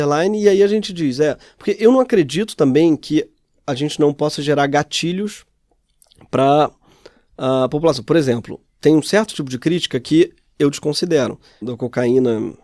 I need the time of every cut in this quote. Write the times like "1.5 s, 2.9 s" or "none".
11.6 s